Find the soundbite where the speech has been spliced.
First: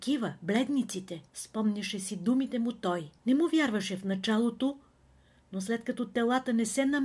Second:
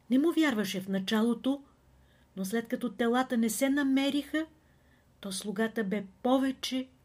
first; 2 cuts; at 1.3 s, 3.2 s

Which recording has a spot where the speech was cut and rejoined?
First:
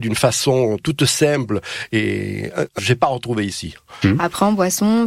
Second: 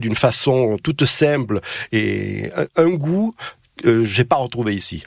first; 2 cuts; at 2.8 s, 4.0 s

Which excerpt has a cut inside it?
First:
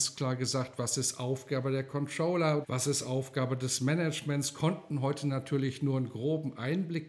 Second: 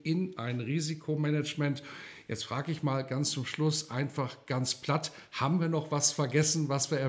first; 1 cut; at 2.6 s

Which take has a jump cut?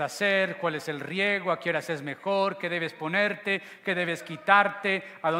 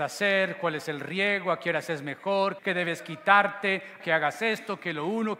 second; 2 cuts; at 2.6 s, 4.0 s

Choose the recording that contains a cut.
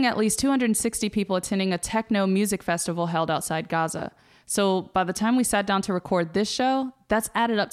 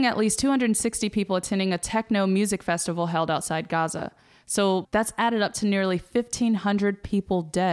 second; 1 cut; at 4.8 s

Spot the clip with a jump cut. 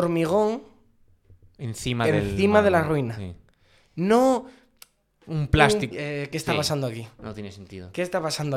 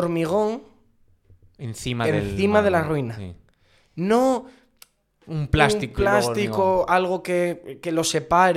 first; 1 cut; at 5.9 s

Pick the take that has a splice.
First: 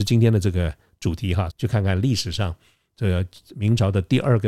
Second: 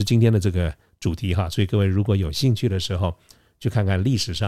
first; 1 cut; at 1.5 s

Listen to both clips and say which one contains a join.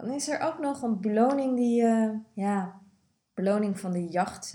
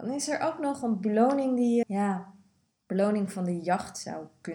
second; 1 cut; at 1.8 s

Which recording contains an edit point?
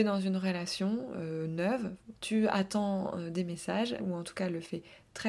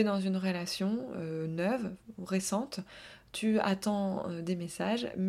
first; 2 cuts; at 2.1 s, 4.0 s

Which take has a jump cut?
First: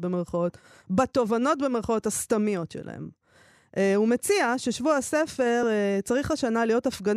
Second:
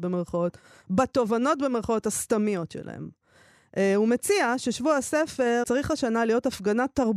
second; 1 cut; at 5.6 s

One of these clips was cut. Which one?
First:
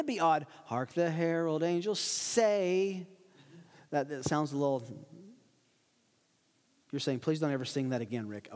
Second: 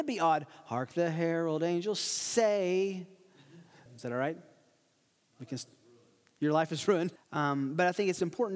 second; 2 cuts; at 3.9 s, 7.2 s

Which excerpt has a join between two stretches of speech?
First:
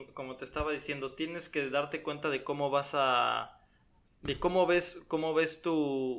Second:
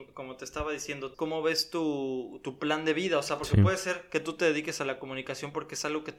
second; 1 cut; at 1.1 s

